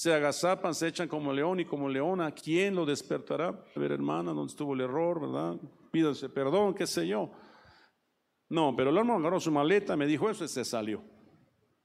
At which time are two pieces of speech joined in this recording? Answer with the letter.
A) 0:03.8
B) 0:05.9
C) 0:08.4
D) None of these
A